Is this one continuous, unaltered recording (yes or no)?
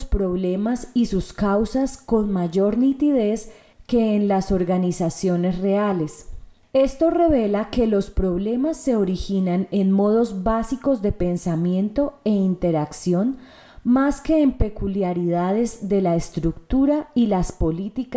yes